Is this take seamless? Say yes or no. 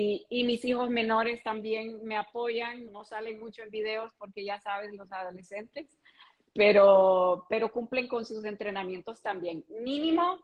no